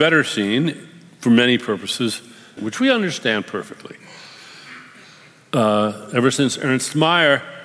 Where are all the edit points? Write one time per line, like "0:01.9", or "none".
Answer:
0:02.6